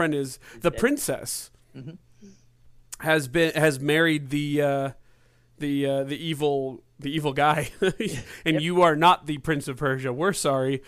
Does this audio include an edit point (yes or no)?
no